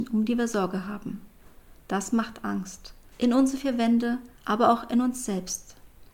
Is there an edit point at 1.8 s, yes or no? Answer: no